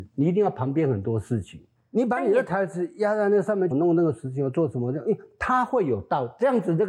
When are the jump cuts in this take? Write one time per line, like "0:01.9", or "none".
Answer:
0:01.8
0:03.7